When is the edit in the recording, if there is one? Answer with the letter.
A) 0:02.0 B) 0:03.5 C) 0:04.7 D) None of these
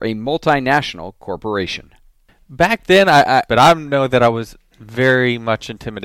B